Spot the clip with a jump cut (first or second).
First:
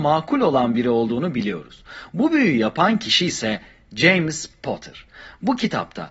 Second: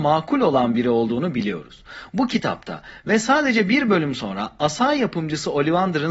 second